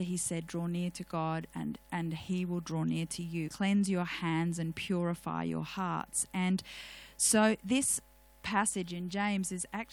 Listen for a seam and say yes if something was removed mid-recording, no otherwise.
yes